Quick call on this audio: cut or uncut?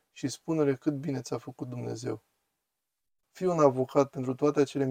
cut